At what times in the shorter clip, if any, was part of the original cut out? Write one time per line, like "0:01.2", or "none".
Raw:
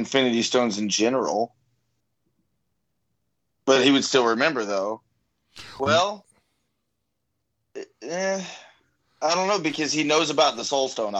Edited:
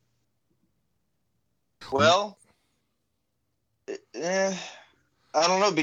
0:01.8